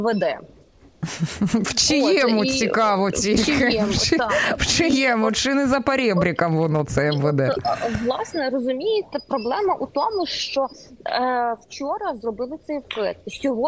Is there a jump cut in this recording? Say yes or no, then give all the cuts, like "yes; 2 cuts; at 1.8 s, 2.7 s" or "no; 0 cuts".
no; 0 cuts